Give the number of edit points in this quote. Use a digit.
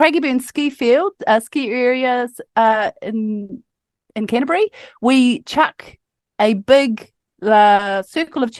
0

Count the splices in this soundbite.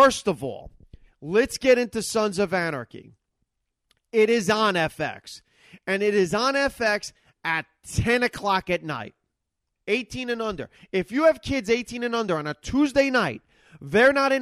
1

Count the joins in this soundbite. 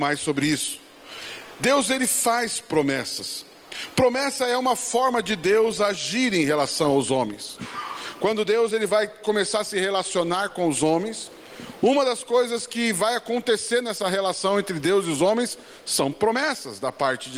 0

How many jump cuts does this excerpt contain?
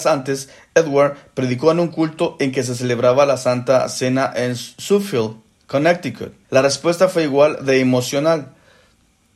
1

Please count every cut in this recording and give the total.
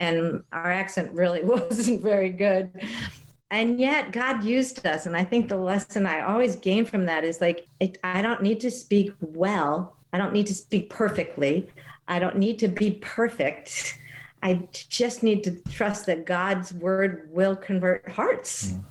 2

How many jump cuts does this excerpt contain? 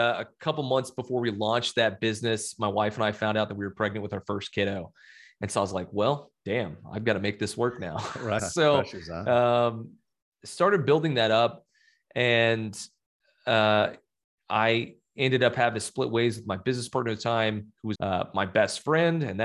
2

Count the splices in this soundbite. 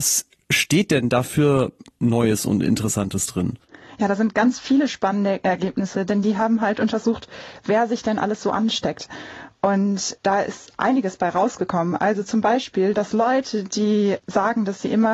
1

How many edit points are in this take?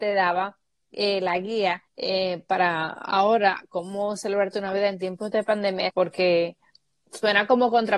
2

